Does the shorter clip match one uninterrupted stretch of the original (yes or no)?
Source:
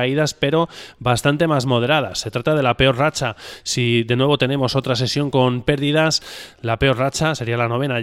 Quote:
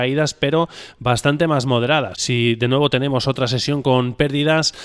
no